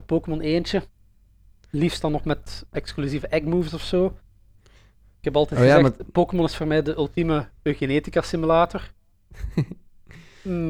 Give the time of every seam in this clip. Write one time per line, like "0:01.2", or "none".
none